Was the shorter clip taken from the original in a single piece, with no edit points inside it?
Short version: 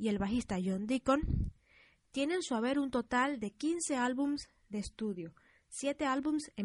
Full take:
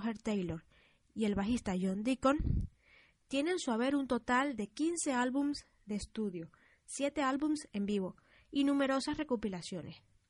yes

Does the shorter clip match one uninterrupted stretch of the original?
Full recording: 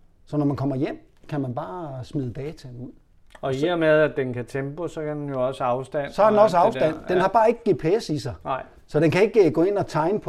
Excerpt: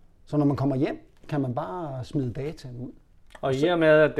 yes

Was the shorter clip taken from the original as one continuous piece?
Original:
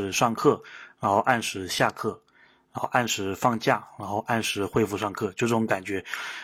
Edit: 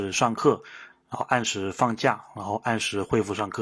no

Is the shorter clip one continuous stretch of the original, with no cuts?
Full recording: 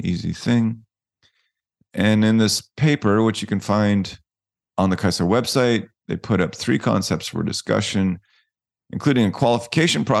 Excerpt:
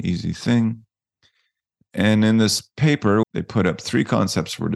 no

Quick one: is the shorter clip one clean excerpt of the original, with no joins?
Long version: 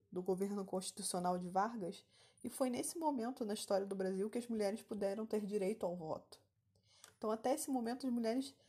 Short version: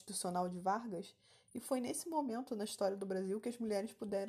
yes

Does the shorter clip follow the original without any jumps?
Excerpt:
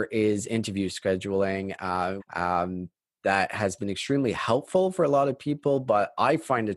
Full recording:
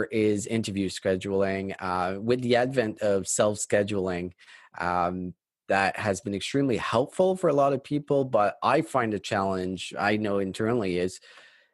no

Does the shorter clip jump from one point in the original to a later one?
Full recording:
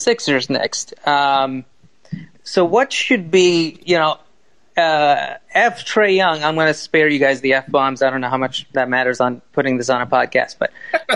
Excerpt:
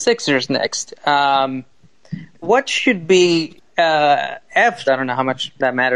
yes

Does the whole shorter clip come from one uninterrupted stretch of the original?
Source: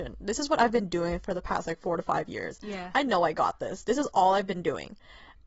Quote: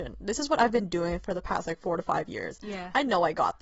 yes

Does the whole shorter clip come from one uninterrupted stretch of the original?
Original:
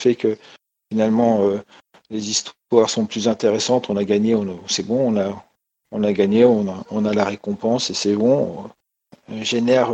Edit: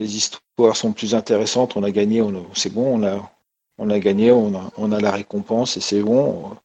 yes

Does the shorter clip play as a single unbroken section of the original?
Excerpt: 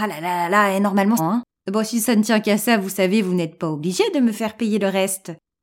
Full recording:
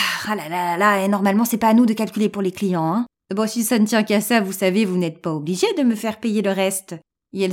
no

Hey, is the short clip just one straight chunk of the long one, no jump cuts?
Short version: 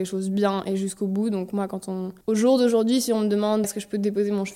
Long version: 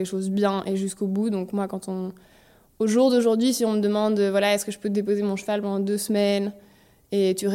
no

